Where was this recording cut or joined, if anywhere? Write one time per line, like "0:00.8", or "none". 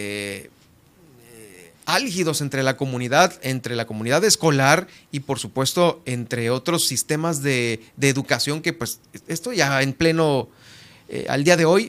none